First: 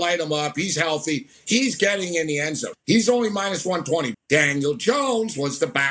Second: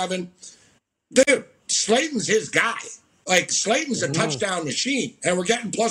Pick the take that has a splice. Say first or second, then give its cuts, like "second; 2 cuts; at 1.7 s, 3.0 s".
first; 2 cuts; at 2.7 s, 4.1 s